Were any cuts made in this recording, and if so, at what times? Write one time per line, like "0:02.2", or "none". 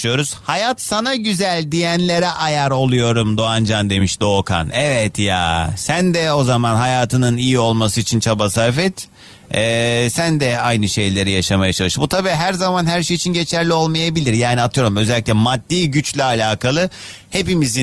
none

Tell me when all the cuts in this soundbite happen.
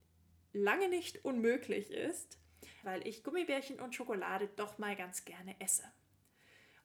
0:02.8

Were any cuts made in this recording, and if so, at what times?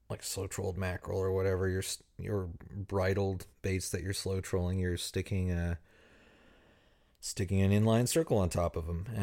0:03.5

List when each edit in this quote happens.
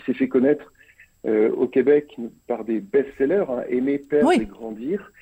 none

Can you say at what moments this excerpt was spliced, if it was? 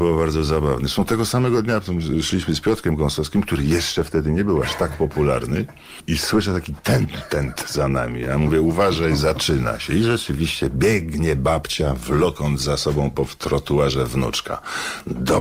none

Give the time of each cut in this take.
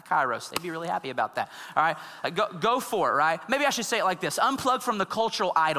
none

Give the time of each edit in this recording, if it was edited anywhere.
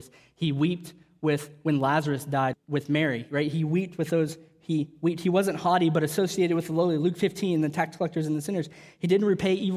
0:02.5

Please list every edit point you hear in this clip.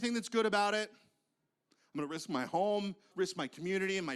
0:03.1

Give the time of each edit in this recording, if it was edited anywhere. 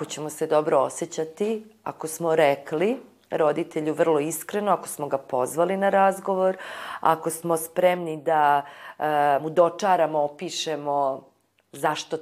none

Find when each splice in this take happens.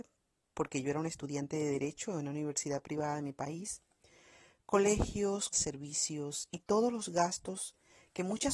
0:05.5

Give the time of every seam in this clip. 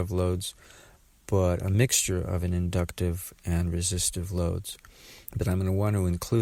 0:05.3

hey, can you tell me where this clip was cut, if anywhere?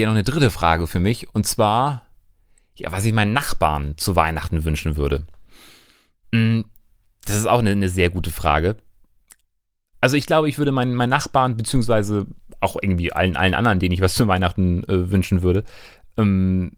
none

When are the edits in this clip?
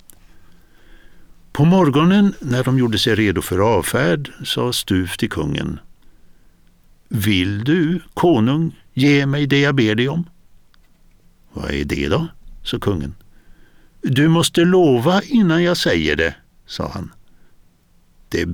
none

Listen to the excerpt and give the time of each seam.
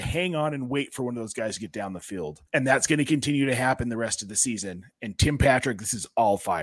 0:02.5

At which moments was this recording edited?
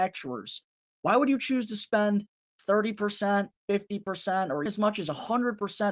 0:03.6
0:04.7

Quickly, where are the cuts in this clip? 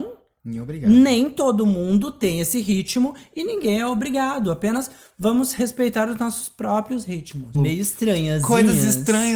0:07.5

